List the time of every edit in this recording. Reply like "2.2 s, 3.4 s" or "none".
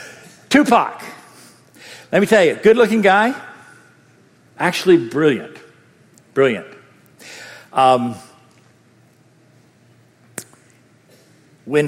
none